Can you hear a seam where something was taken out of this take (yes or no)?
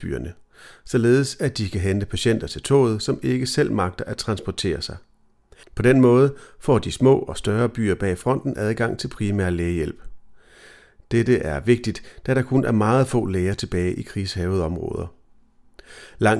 yes